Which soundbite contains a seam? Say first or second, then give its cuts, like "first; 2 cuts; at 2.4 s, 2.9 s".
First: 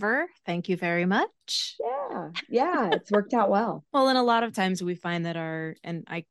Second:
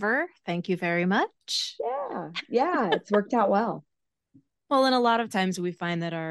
first; 1 cut; at 3.9 s